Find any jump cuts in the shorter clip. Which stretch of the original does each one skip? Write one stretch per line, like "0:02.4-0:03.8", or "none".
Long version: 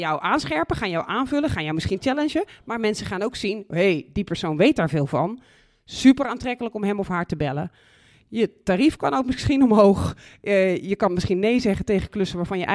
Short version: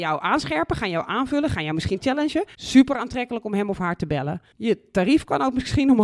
0:02.5-0:05.8
0:07.8-0:08.2